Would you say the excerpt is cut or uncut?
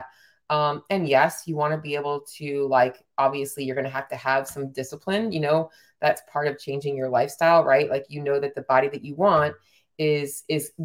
uncut